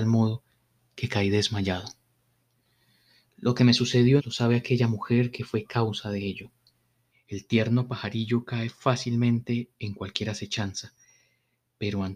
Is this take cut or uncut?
cut